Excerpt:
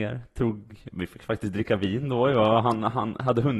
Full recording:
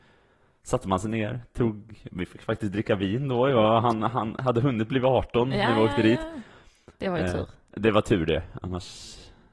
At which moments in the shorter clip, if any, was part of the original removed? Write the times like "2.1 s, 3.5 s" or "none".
none